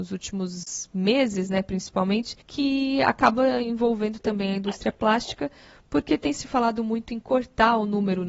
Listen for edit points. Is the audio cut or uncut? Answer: cut